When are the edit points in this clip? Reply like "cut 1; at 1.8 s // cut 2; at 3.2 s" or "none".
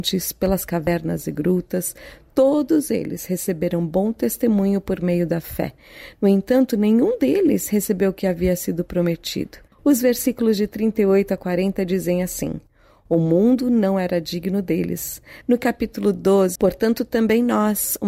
cut 1; at 9.7 s // cut 2; at 15.4 s // cut 3; at 16.6 s